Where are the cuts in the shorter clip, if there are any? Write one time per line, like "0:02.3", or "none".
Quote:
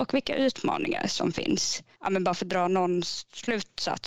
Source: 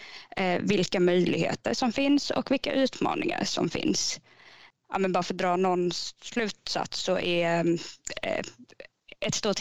0:01.9